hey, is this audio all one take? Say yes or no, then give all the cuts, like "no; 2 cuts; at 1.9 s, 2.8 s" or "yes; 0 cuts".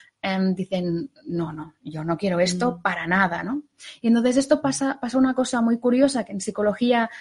yes; 0 cuts